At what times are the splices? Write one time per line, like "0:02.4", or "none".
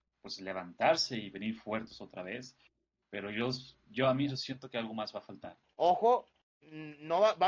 0:04.3
0:05.6